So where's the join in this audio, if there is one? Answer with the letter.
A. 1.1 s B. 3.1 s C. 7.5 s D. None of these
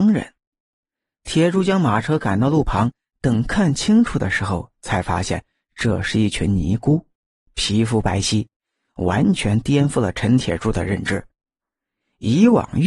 C